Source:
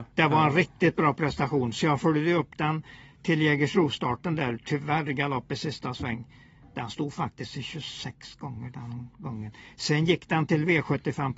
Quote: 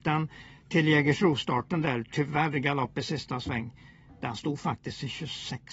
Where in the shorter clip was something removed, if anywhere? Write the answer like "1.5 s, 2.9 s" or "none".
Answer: none